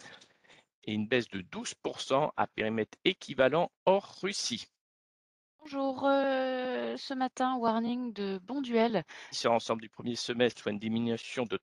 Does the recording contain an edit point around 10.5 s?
yes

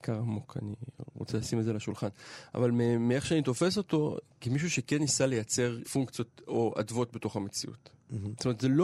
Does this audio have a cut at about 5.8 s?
yes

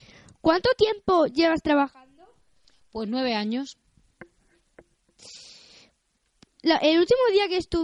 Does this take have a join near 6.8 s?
no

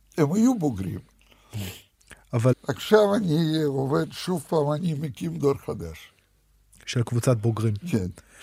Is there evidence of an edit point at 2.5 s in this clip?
yes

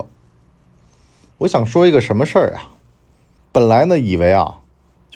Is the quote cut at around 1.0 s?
no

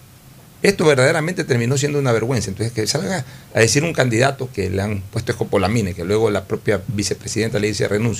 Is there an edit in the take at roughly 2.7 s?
no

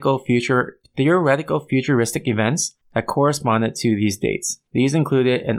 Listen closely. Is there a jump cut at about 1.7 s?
no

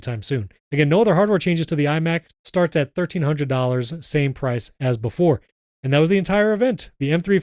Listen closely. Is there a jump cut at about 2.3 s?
yes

